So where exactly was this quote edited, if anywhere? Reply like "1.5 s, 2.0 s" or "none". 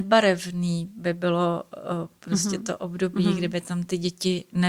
none